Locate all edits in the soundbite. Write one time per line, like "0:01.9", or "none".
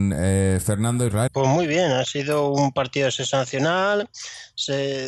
0:01.3